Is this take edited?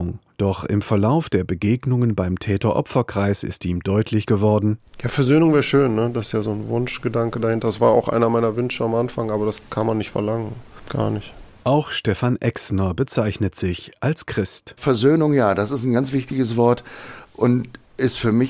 no; 0 cuts

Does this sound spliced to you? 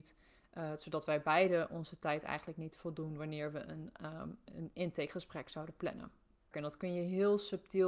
yes; 2 cuts; at 4.5 s, 6.5 s

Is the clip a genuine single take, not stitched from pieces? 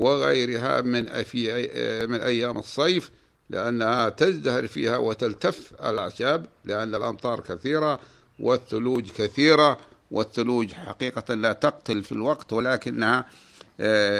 no; 1 cut; at 12.0 s

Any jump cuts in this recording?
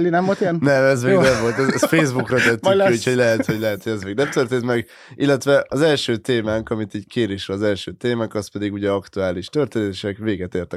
no; 0 cuts

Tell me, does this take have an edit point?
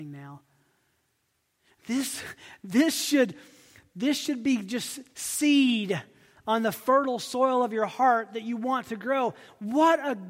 no; 0 cuts

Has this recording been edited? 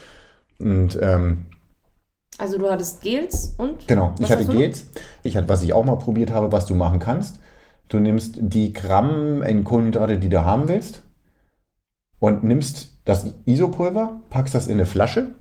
yes; 1 cut; at 5.3 s

